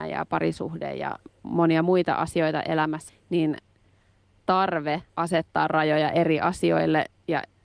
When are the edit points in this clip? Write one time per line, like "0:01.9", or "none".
0:03.1
0:05.1

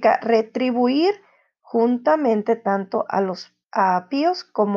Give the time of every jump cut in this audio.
0:03.6

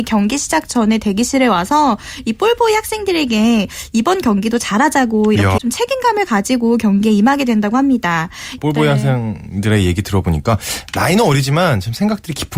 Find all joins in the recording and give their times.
0:05.6
0:08.6

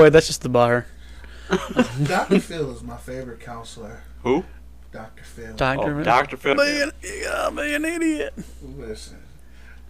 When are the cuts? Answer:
0:06.5

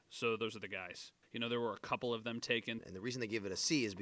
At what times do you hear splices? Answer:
0:01.2
0:02.8

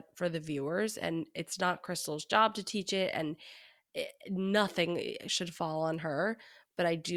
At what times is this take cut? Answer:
none

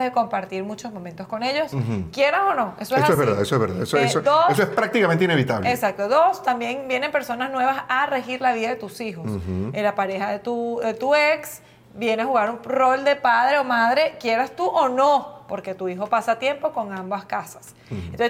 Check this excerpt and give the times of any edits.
none

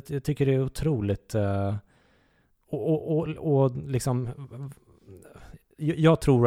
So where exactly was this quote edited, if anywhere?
none

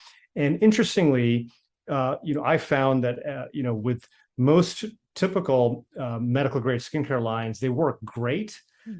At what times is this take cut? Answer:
none

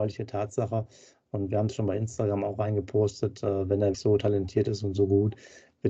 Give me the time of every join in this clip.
0:03.9

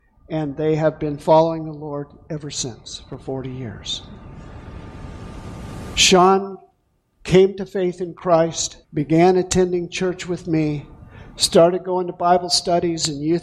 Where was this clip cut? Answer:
0:05.9
0:08.8

